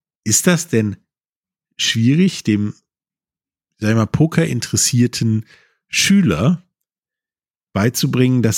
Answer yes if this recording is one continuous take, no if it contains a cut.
yes